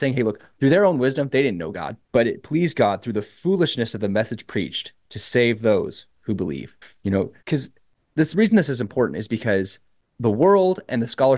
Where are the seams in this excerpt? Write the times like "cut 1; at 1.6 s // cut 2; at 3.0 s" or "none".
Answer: cut 1; at 2.0 s // cut 2; at 7.4 s